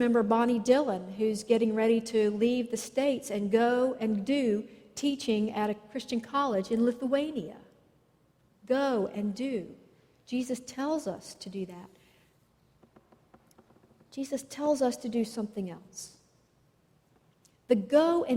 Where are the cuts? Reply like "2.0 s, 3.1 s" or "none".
none